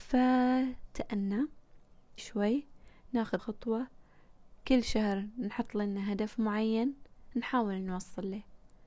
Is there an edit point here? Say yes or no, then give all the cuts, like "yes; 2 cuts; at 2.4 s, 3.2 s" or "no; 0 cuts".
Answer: yes; 2 cuts; at 2.2 s, 3.4 s